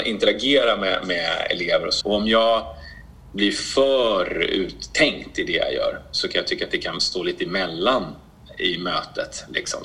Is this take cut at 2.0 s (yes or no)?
yes